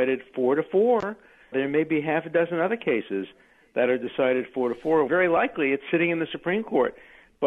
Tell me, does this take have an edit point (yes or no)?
yes